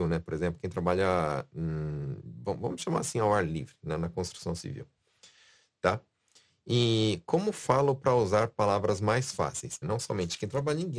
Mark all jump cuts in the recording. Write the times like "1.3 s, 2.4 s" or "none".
9.8 s

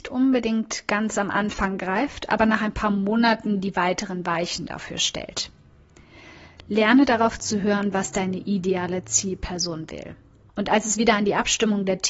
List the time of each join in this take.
10.5 s

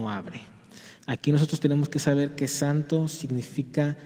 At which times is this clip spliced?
1.0 s

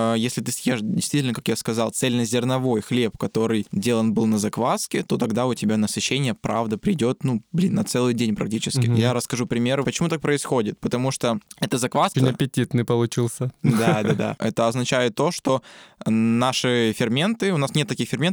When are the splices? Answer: 9.8 s, 12.1 s, 14.4 s

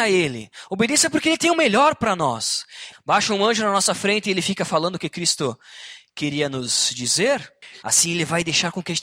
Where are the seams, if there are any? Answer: 2.9 s, 7.8 s

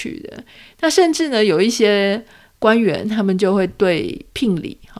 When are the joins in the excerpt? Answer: none

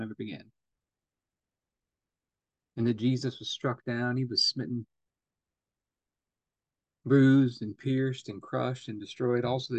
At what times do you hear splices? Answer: none

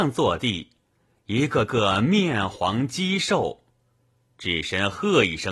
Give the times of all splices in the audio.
none

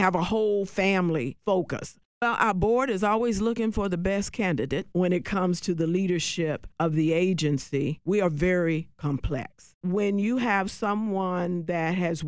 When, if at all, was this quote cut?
2.0 s, 8.0 s, 9.8 s

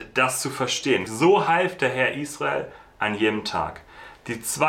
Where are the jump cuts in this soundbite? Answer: 1.1 s

